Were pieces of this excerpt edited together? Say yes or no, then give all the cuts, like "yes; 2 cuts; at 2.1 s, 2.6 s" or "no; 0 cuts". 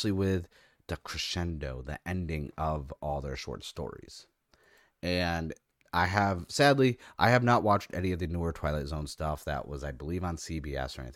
no; 0 cuts